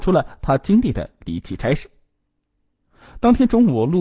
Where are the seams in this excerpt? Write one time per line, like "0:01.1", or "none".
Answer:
none